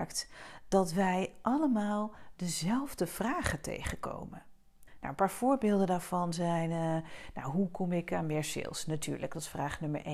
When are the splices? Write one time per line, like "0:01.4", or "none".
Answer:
0:04.9